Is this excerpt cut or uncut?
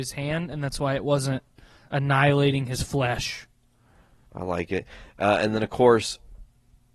cut